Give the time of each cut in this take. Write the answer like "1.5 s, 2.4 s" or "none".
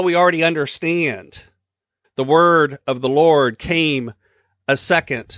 2.0 s